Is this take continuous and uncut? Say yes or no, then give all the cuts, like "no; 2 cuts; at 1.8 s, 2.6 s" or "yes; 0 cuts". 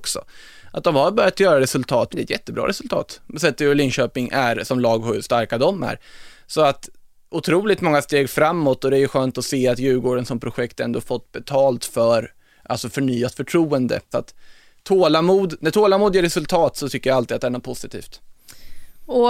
no; 2 cuts; at 2.1 s, 14.1 s